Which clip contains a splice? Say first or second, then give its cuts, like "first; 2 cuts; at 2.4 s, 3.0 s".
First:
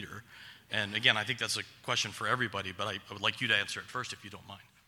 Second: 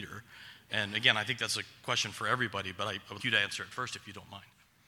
second; 1 cut; at 3.2 s